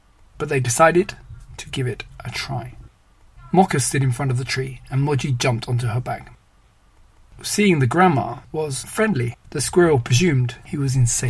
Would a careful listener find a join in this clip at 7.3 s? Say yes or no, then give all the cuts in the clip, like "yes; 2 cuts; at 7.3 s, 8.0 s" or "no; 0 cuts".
yes; 2 cuts; at 7.3 s, 9.4 s